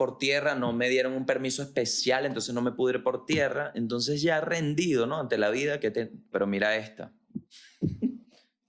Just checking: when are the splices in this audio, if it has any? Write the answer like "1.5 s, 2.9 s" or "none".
6.3 s